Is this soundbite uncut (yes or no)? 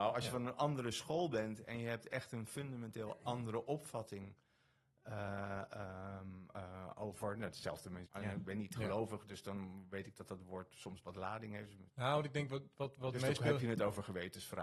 no